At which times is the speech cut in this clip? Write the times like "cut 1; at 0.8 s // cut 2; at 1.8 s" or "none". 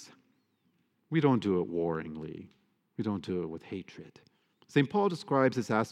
cut 1; at 4.5 s